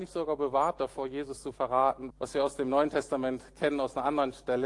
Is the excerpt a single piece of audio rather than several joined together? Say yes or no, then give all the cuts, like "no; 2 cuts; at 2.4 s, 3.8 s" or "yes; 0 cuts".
no; 1 cut; at 2.1 s